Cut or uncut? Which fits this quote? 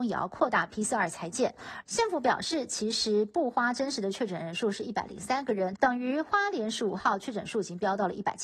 cut